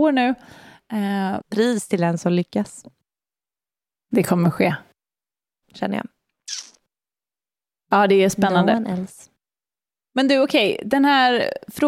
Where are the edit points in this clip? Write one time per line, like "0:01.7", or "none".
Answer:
0:01.4
0:05.6